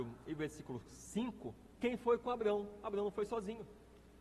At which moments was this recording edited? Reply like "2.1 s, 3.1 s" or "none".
none